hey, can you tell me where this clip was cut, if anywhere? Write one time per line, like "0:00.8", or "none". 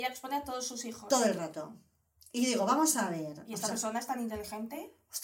none